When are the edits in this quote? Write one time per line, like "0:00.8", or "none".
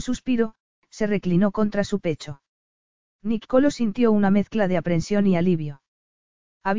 none